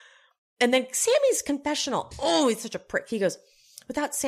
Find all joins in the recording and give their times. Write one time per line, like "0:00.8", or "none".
none